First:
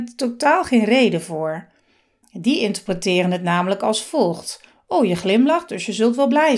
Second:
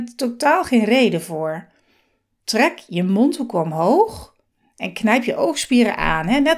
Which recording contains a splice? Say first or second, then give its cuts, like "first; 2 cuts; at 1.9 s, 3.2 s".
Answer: first; 1 cut; at 2.2 s